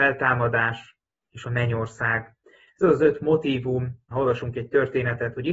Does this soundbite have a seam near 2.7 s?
no; 1 cut; at 4.1 s

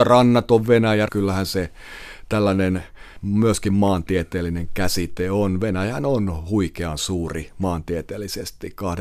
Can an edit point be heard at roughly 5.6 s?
no; 1 cut; at 1.1 s

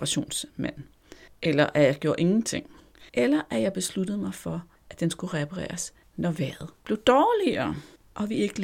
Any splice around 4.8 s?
no; 1 cut; at 3.1 s

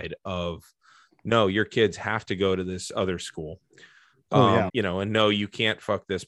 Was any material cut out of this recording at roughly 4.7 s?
yes; 1 cut; at 4.7 s

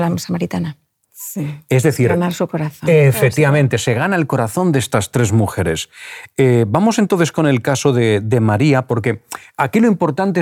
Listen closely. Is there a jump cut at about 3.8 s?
no; 1 cut; at 1.0 s

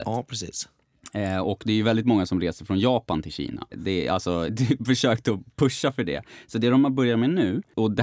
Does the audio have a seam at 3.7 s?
yes; 1 cut; at 3.7 s

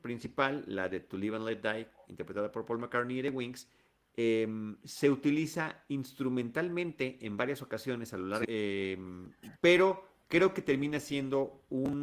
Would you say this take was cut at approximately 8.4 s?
yes; 2 cuts; at 8.4 s, 9.5 s

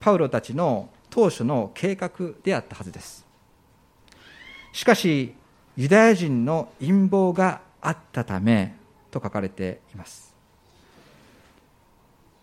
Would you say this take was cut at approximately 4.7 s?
no; 0 cuts

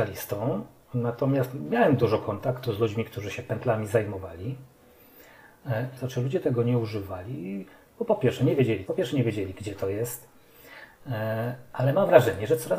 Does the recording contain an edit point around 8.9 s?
yes; 2 cuts; at 6.0 s, 8.9 s

